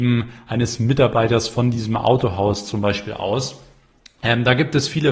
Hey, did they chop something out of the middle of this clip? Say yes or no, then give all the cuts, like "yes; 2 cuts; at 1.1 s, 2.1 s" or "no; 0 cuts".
no; 0 cuts